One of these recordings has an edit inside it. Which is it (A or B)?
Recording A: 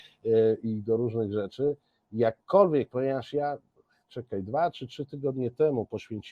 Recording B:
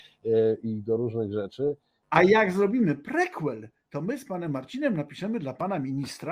B